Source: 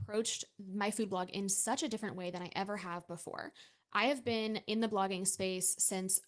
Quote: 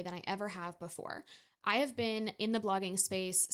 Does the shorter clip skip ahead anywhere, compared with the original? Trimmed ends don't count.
no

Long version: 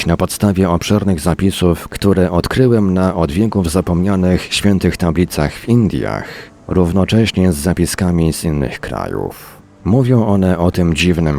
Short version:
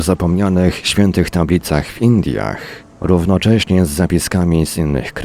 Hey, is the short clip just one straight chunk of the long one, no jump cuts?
yes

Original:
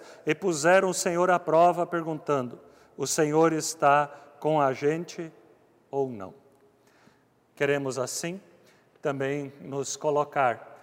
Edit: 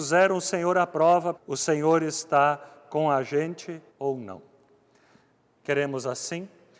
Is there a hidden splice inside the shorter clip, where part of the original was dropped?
yes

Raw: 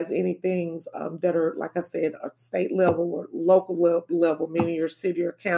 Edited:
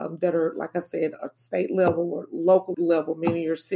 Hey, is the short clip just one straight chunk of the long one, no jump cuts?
no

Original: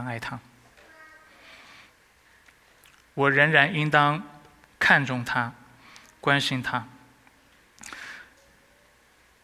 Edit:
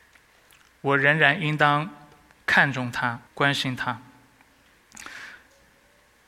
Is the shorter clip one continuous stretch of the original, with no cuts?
no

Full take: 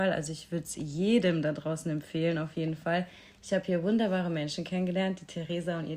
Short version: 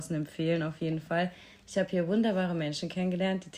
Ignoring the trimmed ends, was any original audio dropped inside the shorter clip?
no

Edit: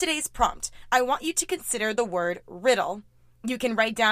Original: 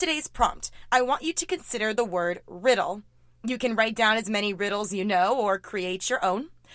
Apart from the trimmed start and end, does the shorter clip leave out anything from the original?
no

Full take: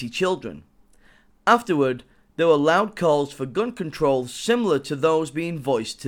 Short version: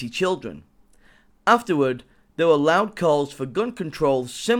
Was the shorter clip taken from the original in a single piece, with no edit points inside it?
yes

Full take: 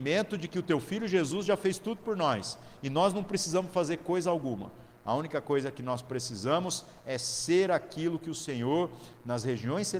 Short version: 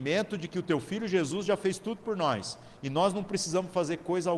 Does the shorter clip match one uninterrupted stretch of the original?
yes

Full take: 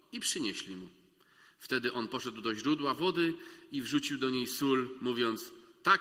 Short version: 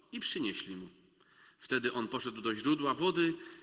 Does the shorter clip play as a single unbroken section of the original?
yes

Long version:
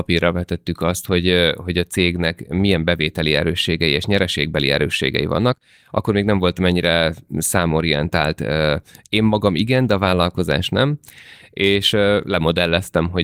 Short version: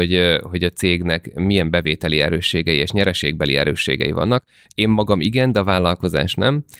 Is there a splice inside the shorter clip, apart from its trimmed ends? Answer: yes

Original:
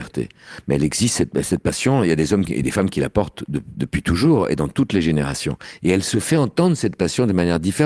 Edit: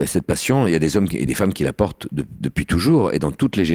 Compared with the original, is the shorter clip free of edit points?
yes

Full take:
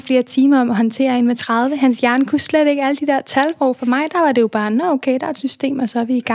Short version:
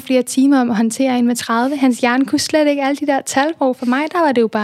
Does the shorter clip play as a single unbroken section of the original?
yes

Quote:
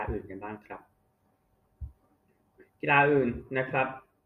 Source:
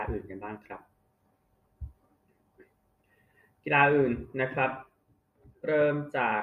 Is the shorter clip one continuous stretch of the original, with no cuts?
no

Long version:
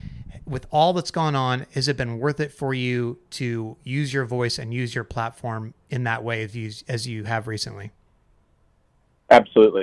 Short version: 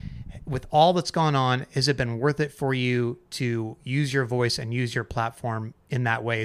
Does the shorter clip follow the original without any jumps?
yes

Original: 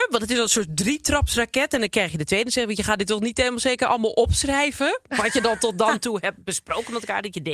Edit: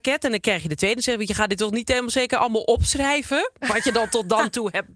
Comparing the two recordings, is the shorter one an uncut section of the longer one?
yes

